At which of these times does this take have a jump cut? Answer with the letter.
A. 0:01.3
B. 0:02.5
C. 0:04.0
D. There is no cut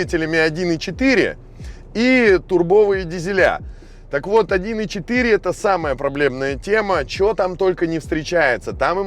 D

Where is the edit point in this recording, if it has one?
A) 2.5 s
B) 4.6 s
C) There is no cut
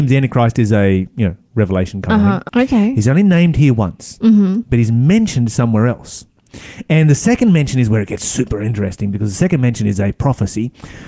A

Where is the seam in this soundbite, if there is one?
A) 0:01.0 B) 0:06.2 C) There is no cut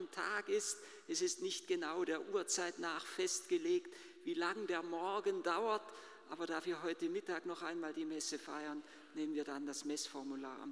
C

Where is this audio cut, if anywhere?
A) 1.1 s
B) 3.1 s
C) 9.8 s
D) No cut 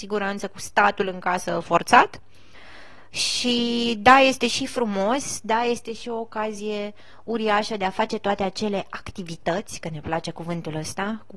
D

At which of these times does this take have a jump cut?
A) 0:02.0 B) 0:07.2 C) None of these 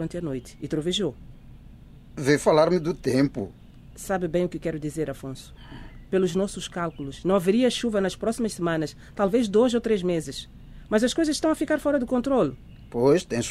C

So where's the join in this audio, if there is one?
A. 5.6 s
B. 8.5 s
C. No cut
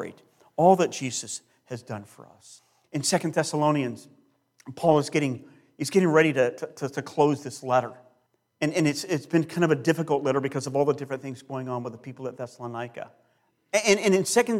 C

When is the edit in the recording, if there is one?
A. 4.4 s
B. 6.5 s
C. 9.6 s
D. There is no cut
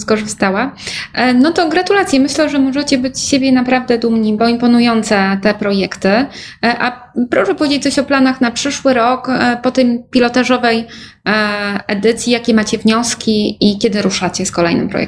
A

